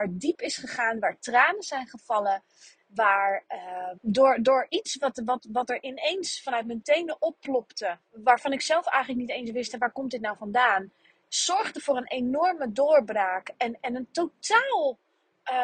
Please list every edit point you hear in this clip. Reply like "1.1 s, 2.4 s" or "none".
3.9 s, 8.0 s